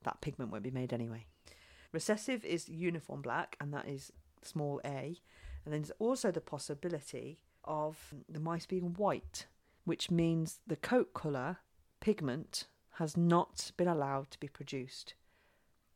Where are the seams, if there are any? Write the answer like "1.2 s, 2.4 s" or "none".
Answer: 1.9 s